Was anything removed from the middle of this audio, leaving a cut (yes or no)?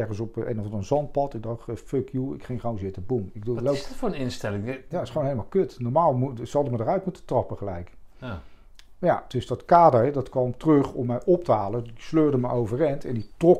no